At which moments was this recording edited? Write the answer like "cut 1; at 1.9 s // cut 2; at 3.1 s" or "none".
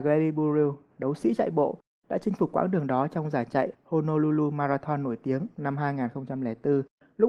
cut 1; at 0.9 s